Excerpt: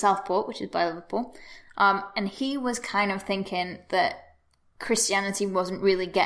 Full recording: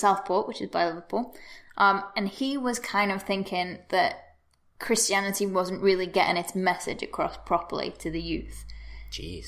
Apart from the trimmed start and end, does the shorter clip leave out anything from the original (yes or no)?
no